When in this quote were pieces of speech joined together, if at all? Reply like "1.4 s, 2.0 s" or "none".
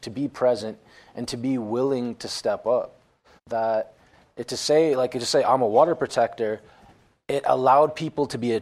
3.4 s